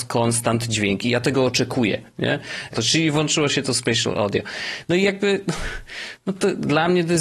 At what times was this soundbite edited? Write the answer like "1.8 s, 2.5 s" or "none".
2.7 s